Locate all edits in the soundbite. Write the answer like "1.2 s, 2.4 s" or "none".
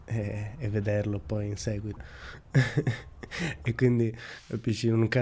2.0 s